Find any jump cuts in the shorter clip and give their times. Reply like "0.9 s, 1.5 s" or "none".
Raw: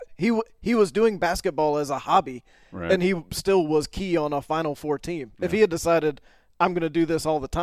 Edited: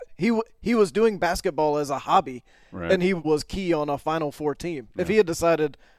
3.2 s